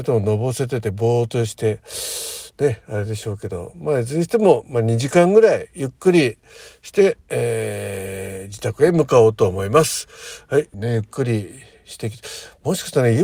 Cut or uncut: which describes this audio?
cut